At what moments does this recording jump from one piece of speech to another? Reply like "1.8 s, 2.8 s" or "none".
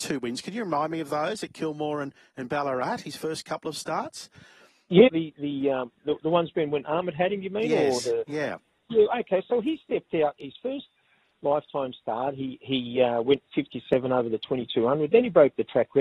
5.1 s

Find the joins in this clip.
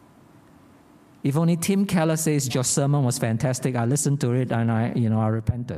2.5 s

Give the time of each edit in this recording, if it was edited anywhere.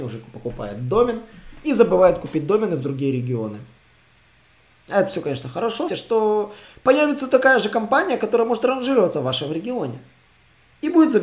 5.9 s

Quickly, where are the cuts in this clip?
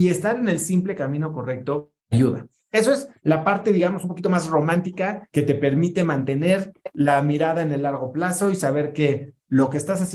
2.0 s

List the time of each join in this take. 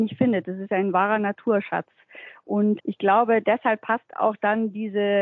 2.8 s

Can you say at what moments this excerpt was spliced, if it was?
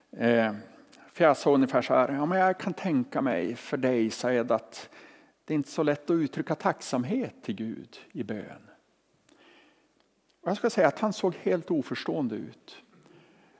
none

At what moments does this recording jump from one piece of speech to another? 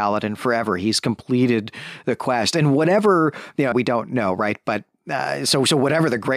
3.7 s

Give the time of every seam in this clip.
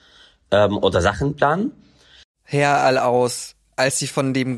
2.2 s

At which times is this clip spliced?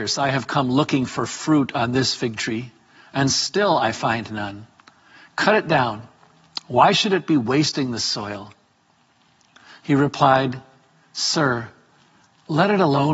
none

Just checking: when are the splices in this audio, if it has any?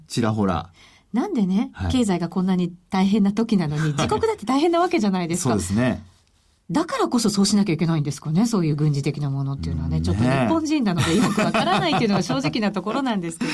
none

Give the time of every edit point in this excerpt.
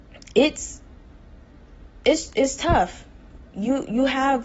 none

